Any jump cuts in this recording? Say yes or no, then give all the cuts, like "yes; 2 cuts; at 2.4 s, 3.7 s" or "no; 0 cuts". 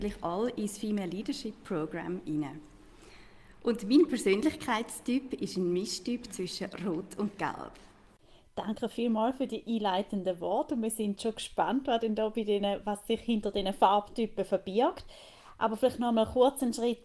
no; 0 cuts